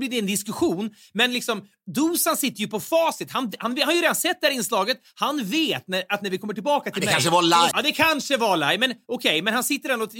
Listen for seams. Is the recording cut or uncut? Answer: cut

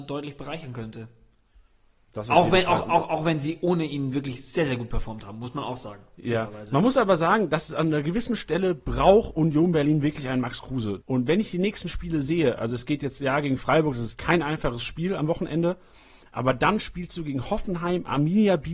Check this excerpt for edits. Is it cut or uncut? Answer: cut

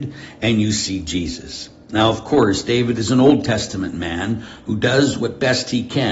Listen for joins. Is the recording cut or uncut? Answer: uncut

